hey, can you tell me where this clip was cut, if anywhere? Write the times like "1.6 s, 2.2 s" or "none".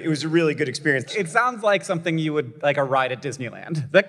1.1 s